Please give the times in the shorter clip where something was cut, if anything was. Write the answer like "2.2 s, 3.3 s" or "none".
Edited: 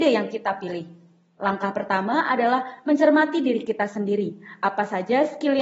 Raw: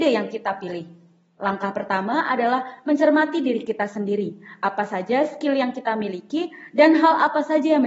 none